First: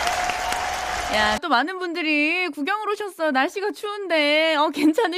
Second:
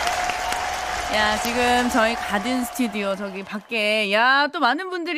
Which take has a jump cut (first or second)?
first